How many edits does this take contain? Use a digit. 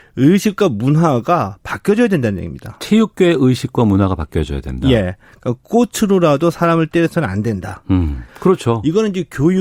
1